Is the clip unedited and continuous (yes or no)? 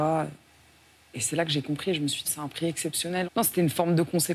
no